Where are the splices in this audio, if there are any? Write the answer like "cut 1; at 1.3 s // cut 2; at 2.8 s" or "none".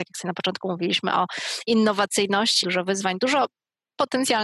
cut 1; at 2.6 s